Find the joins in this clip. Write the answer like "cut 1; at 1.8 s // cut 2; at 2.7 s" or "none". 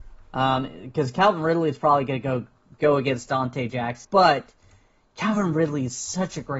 cut 1; at 4.0 s